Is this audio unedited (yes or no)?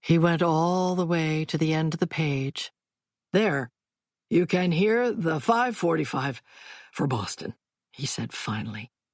yes